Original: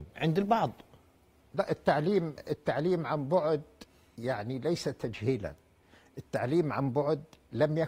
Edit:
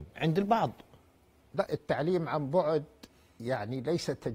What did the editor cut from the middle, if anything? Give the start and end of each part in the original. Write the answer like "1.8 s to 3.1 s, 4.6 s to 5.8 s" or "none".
1.7 s to 2.4 s

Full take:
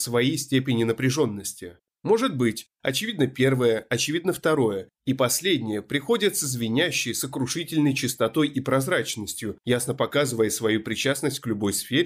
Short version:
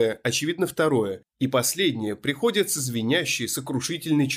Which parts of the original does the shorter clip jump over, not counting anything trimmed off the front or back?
none

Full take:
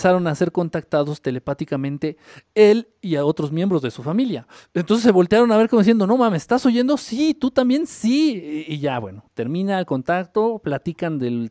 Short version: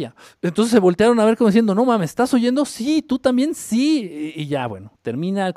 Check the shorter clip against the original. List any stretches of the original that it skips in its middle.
none

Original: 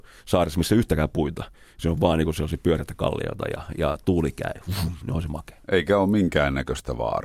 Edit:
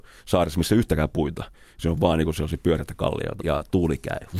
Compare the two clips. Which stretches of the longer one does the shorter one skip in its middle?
3.4 s to 3.7 s

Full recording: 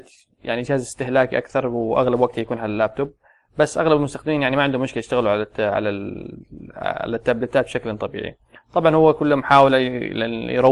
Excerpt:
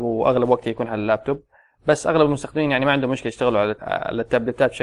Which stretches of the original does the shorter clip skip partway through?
5.5 s to 6.7 s

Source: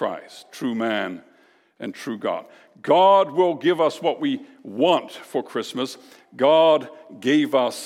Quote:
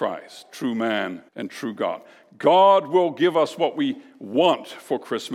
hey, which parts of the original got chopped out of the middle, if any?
1.3 s to 1.7 s

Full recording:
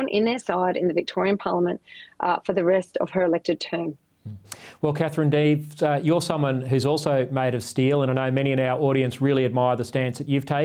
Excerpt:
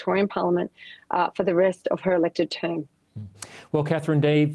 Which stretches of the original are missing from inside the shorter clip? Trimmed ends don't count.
none

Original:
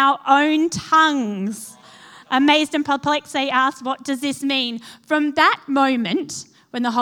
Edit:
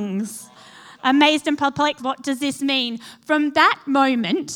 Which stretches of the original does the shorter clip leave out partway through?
3.3 s to 3.8 s

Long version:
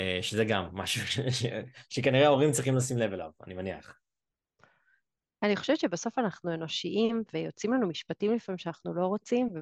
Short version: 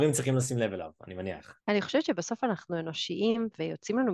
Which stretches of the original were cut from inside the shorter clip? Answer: 4.0 s to 5.3 s

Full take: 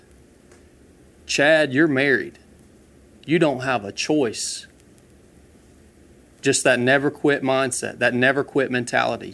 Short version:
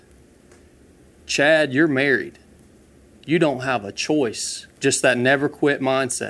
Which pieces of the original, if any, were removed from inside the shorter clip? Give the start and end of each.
4.7 s to 6.3 s

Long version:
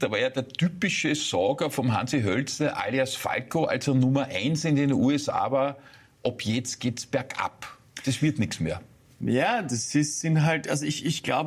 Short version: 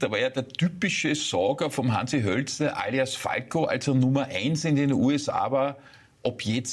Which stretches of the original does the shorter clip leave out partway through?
none

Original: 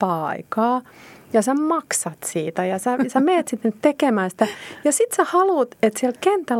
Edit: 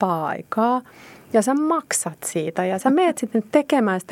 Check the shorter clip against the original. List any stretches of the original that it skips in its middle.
2.8 s to 3.1 s

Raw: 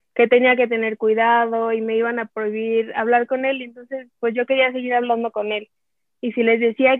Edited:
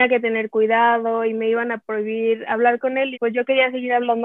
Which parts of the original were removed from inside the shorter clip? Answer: 3.6 s to 4.2 s

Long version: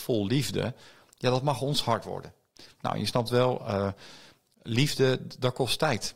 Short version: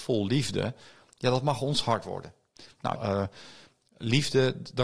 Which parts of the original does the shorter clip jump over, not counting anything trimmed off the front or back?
2.9 s to 3.6 s

